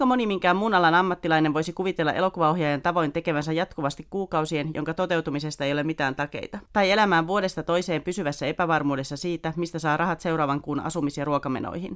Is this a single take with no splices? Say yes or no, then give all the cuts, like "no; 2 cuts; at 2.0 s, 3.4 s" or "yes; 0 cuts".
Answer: no; 2 cuts; at 4.7 s, 6.7 s